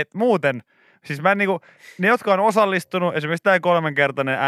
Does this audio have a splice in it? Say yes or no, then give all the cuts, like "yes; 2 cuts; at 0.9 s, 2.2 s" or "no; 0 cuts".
no; 0 cuts